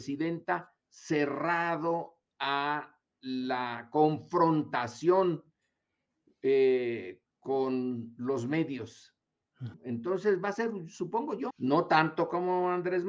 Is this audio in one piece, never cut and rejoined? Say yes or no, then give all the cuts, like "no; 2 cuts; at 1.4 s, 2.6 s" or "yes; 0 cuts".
no; 2 cuts; at 9.7 s, 11.5 s